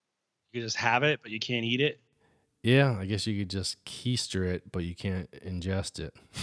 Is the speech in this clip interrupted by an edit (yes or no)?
no